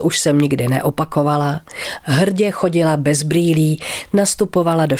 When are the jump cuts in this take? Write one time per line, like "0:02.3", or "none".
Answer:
none